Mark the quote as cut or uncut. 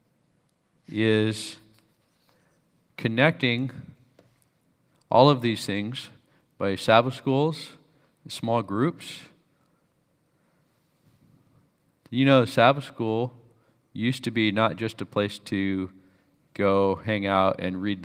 uncut